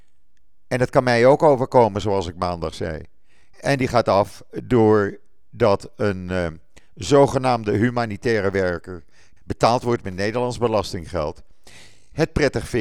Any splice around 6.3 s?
no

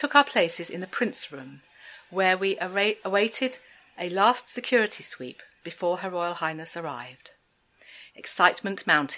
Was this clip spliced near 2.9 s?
no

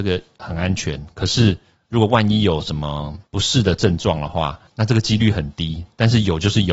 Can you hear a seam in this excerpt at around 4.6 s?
no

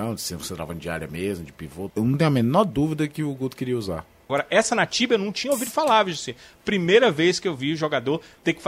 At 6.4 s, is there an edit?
no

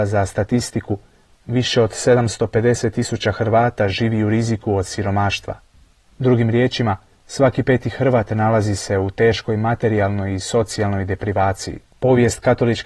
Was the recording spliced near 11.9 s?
yes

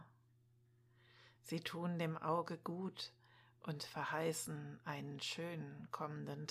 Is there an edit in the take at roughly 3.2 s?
no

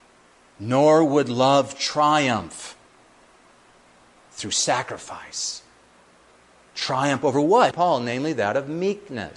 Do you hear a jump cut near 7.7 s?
yes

